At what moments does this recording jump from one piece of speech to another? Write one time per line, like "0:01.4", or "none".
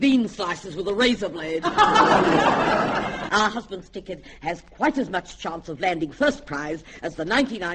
0:03.3